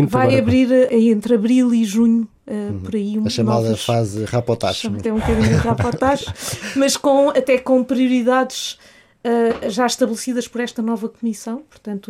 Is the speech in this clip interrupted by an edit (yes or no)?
yes